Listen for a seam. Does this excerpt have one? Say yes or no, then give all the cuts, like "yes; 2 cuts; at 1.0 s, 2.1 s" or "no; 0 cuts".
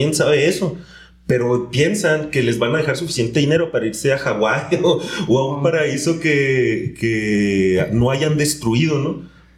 no; 0 cuts